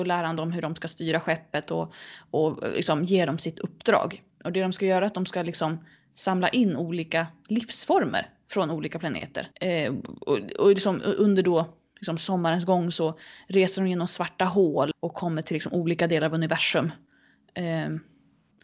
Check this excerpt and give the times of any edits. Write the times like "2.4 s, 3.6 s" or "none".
9.5 s, 14.9 s

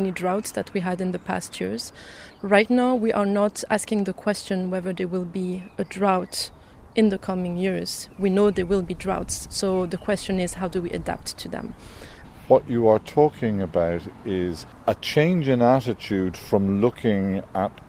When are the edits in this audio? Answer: none

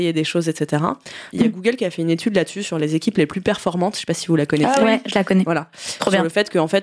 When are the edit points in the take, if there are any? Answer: 1.3 s

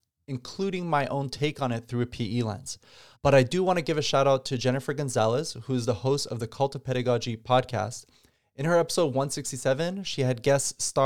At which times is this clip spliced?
3.1 s

